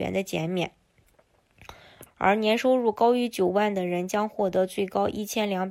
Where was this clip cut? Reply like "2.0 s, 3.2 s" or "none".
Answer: 2.1 s